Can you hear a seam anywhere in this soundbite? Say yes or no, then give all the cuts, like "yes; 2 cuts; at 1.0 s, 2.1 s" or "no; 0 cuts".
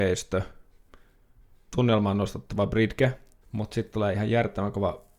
yes; 2 cuts; at 1.7 s, 3.4 s